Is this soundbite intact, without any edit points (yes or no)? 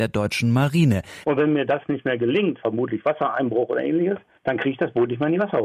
no